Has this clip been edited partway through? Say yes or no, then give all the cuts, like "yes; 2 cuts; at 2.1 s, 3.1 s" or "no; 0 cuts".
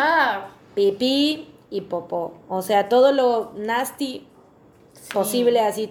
no; 0 cuts